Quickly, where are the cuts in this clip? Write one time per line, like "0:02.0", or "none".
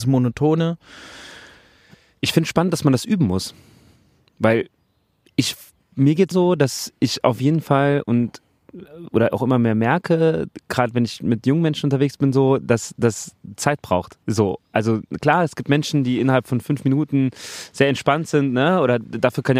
0:06.3
0:14.2